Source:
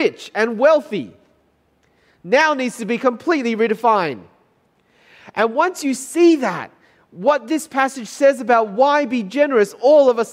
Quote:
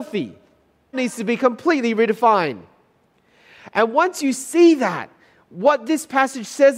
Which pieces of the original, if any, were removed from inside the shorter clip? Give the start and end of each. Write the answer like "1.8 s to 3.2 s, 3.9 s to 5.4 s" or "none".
1.7 s to 2.5 s